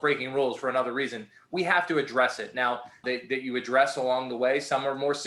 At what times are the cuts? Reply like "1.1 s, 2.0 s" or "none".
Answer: 3.0 s